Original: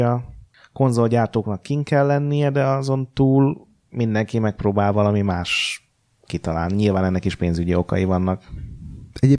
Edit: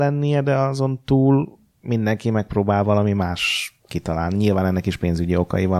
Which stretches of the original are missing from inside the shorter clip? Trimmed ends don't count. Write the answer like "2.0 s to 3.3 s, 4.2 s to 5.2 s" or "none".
5.9 s to 6.2 s